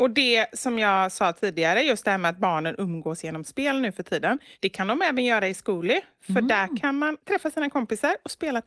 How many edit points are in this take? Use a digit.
0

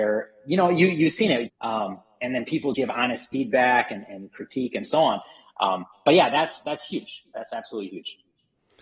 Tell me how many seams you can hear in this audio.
2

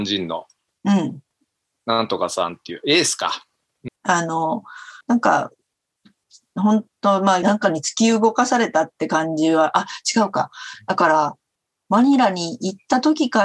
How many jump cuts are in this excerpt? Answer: 3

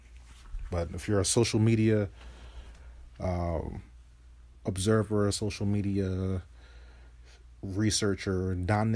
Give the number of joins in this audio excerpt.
1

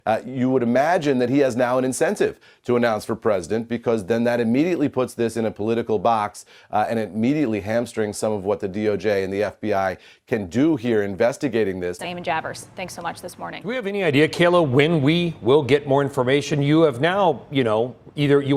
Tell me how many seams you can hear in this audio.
1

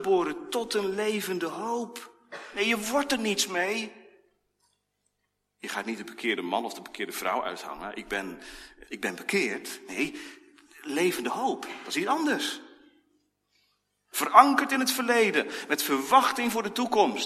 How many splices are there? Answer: 2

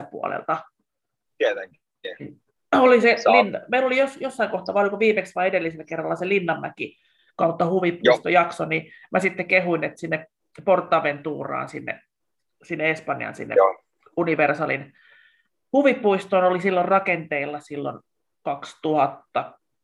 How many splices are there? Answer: 1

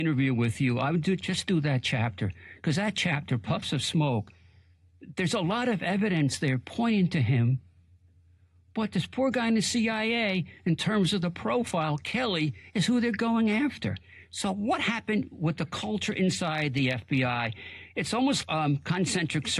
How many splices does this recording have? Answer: 1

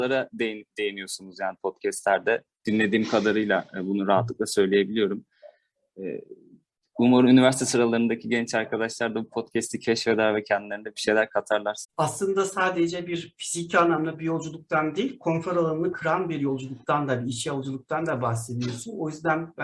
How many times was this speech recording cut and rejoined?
2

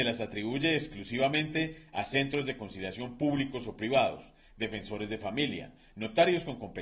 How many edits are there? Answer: 0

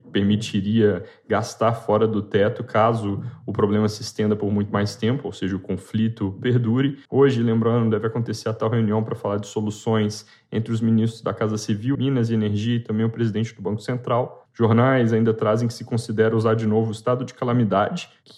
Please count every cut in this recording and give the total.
3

